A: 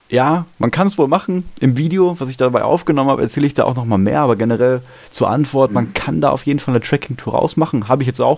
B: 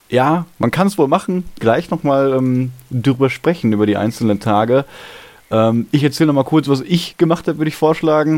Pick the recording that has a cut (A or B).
B